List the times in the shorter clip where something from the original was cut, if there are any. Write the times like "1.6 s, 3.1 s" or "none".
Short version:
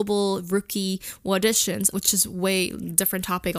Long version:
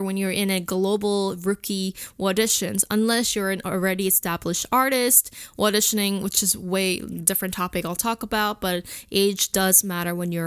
1.9 s